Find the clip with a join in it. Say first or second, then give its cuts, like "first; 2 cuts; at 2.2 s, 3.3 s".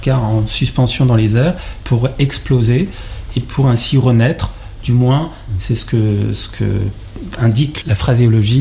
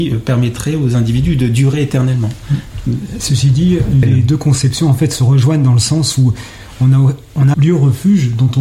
second; 2 cuts; at 4.0 s, 7.5 s